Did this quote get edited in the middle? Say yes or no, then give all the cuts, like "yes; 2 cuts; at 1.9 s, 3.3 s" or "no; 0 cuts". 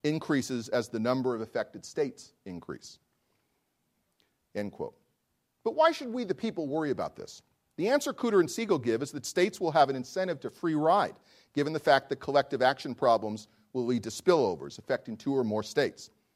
no; 0 cuts